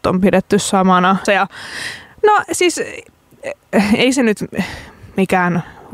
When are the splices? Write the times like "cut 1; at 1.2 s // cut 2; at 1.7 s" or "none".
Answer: cut 1; at 1.3 s